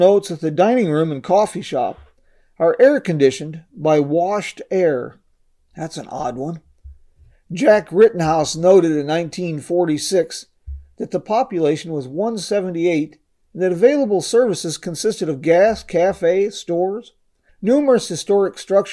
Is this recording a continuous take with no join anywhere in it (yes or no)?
no